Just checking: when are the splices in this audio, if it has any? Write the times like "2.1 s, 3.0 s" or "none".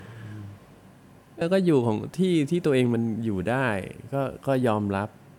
1.4 s